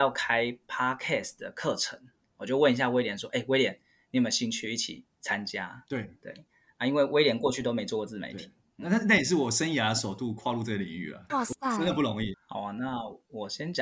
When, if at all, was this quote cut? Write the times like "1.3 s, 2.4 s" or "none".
11.3 s, 12.3 s